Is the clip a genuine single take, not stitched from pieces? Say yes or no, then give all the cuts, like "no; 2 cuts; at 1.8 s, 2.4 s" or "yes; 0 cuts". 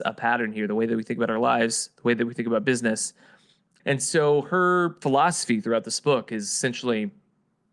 no; 1 cut; at 3.8 s